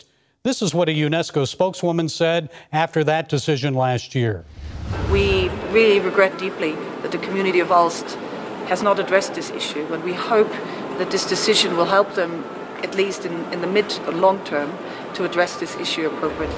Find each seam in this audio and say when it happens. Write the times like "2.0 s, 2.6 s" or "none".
6.3 s